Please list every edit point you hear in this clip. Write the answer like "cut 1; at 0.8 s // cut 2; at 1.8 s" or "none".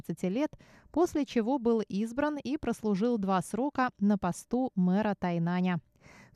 none